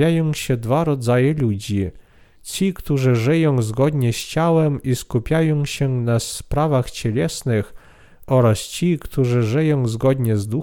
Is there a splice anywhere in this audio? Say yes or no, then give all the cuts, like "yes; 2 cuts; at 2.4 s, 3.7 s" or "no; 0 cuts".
no; 0 cuts